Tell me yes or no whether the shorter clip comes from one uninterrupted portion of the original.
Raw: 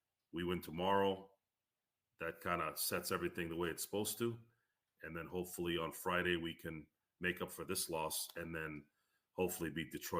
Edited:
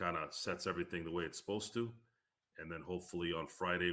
yes